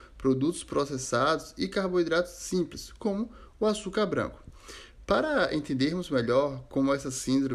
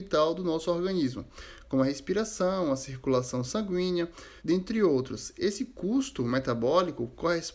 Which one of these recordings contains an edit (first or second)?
second